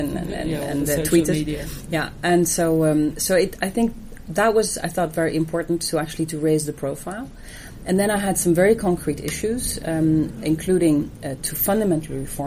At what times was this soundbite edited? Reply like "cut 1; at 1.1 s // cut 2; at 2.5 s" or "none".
none

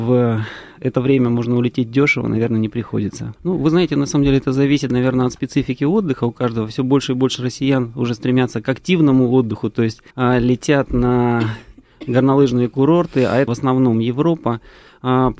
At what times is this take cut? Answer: cut 1; at 3.4 s // cut 2; at 10.1 s // cut 3; at 13.5 s

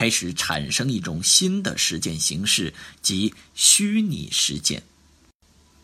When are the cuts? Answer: none

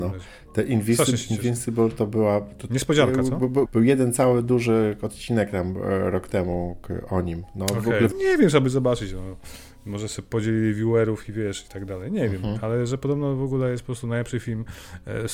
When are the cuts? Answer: cut 1; at 3.7 s // cut 2; at 8.1 s

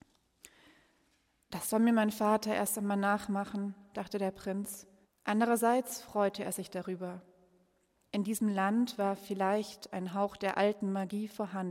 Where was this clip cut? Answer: cut 1; at 5.0 s

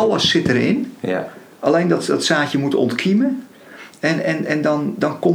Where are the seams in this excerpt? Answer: none

